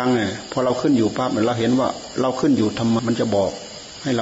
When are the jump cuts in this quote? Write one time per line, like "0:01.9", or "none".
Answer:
0:03.0